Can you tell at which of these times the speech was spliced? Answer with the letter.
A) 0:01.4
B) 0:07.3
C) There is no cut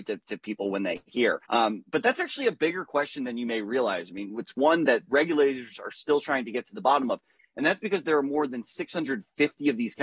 A